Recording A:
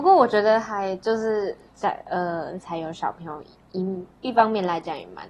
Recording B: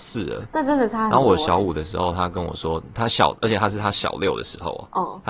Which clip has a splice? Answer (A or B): A